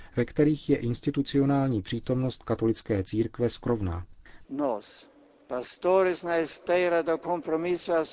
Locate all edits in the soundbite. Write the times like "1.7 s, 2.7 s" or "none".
4.4 s